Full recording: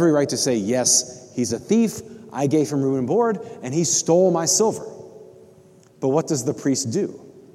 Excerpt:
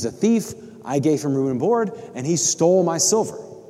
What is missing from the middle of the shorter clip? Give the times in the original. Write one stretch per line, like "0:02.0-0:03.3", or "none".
none